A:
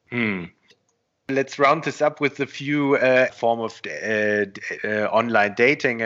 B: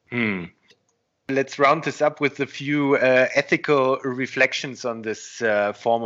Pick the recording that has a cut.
A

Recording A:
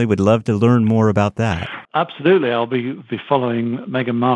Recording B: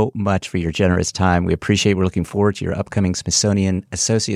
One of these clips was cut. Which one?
A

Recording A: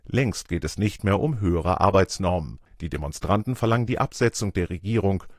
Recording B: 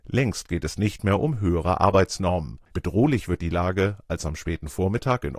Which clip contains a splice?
B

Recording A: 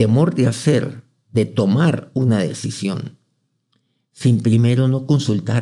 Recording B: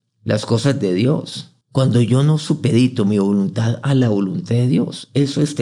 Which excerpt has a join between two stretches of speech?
B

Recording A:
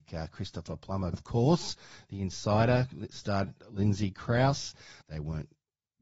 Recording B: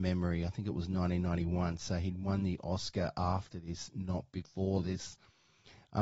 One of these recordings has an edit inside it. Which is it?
A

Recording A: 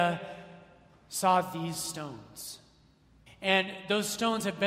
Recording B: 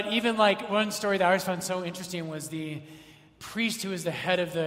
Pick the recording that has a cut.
A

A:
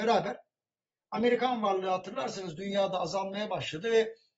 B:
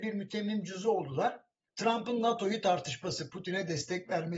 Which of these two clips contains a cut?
B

